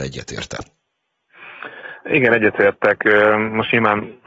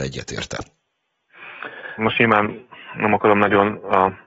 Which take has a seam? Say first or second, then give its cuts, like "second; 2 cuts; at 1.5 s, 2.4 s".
second; 1 cut; at 2.0 s